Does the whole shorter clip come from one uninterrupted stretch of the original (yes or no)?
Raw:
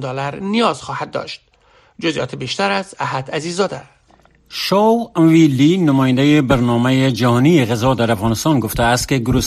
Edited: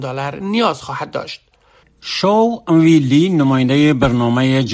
no